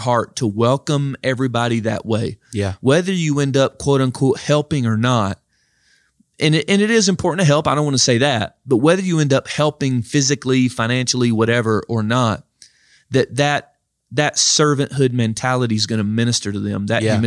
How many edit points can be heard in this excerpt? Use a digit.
0